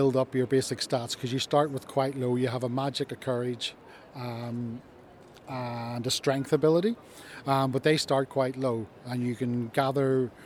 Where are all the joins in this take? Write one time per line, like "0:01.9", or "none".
none